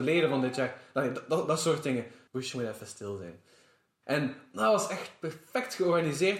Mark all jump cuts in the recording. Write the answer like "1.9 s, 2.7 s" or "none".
2.3 s, 4.0 s